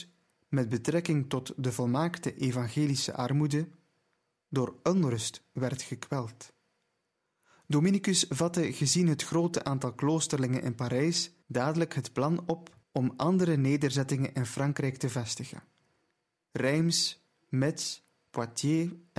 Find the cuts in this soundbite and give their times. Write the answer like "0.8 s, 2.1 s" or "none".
11.4 s, 12.8 s